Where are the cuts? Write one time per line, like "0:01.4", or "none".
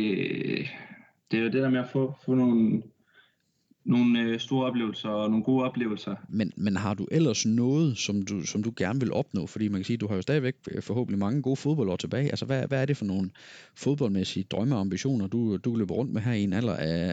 0:06.3